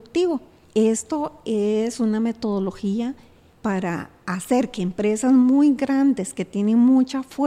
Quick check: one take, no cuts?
yes; 0 cuts

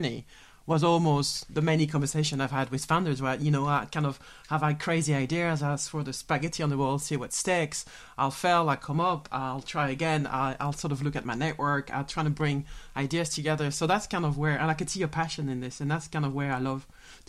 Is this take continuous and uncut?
yes; 0 cuts

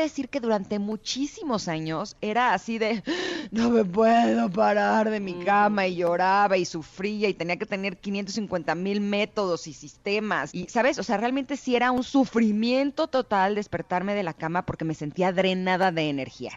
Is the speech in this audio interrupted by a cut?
yes; 1 cut; at 10.5 s

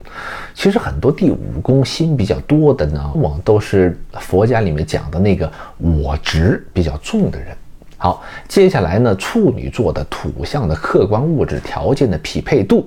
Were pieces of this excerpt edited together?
yes; 1 cut; at 3.2 s

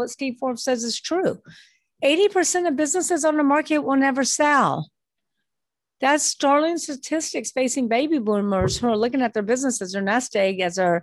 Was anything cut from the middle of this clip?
no; 0 cuts

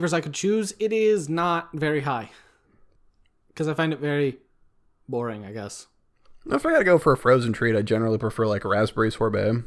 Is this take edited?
no; 0 cuts

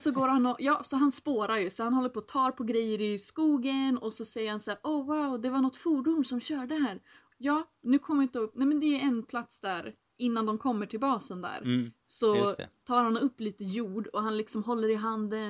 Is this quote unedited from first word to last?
yes; 0 cuts

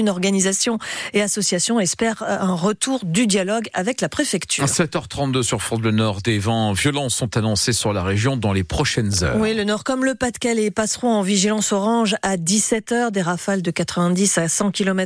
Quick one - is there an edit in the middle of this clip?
no; 0 cuts

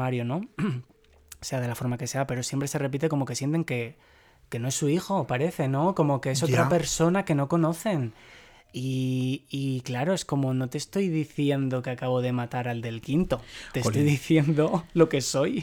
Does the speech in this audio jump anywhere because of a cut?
no; 0 cuts

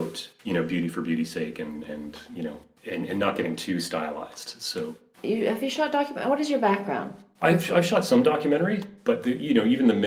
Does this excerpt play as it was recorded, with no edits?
yes; 0 cuts

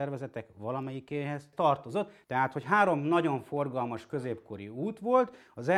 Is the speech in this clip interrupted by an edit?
yes; 1 cut; at 2.2 s

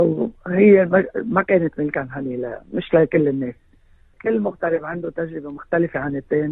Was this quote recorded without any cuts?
no; 1 cut; at 4.1 s

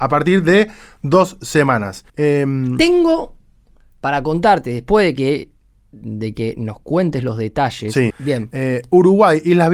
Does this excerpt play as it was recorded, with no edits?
no; 2 cuts; at 2.1 s, 8.1 s

